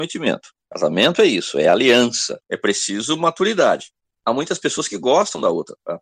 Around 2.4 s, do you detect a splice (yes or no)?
yes